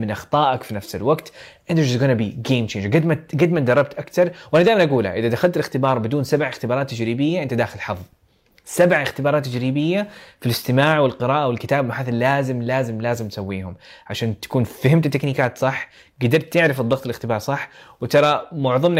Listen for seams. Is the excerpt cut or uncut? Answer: uncut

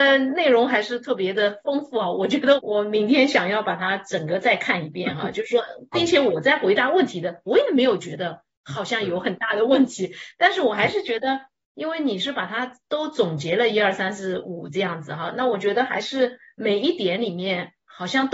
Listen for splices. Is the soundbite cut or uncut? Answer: cut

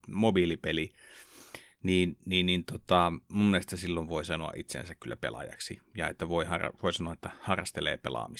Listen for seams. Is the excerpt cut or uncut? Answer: uncut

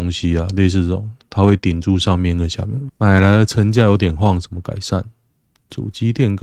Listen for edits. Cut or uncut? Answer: cut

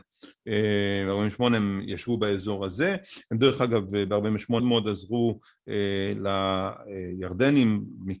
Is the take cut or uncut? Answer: cut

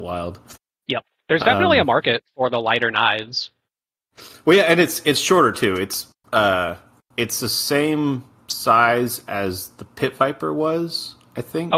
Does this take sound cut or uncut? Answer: uncut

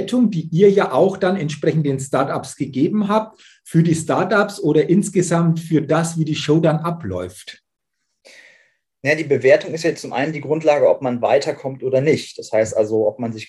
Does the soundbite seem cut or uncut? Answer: uncut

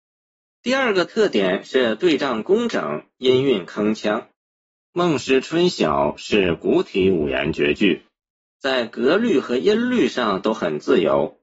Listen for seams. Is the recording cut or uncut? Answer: uncut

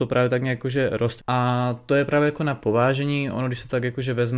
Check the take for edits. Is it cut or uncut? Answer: cut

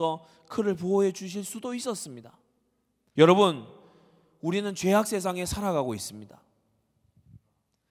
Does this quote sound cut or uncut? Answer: cut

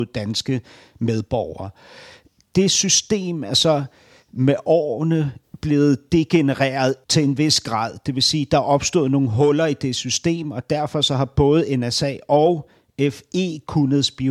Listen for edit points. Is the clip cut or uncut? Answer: cut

